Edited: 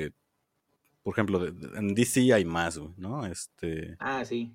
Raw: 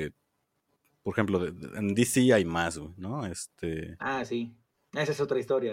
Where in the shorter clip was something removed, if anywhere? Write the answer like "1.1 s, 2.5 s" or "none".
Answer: none